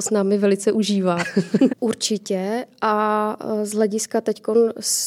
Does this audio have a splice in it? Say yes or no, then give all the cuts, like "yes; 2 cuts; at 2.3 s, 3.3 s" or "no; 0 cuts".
yes; 1 cut; at 1.7 s